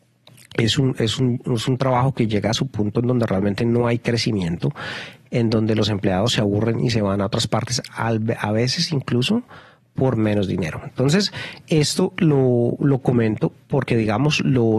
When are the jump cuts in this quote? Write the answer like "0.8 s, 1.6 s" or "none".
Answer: 12.8 s